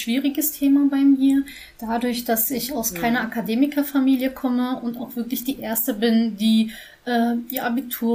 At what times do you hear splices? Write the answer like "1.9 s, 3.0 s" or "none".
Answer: none